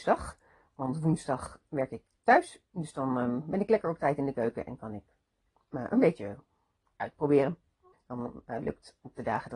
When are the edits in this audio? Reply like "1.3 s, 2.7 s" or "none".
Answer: 1.7 s, 7.9 s